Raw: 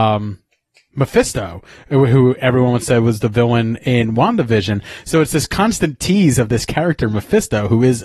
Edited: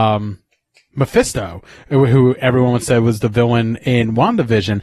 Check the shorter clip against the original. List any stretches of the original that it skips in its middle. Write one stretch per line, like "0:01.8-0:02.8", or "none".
none